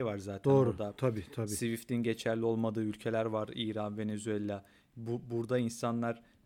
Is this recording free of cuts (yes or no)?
yes